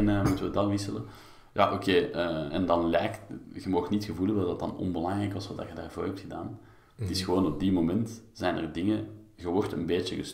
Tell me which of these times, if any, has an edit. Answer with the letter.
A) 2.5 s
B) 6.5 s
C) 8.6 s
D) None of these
A